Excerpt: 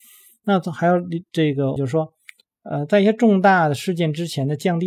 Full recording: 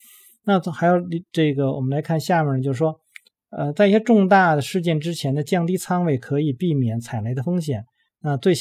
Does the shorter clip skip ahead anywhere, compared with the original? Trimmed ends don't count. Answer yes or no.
yes